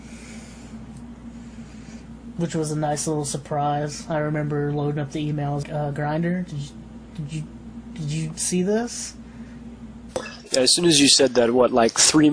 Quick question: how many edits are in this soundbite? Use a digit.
1